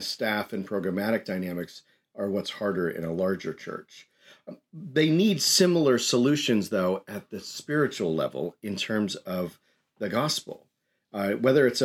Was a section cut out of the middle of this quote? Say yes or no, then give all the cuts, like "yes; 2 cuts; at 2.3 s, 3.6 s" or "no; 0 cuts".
no; 0 cuts